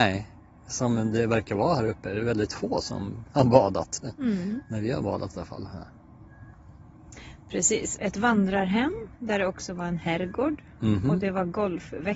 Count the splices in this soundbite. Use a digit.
1